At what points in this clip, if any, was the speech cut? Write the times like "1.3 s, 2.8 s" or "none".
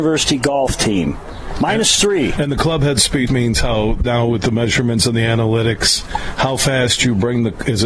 3.3 s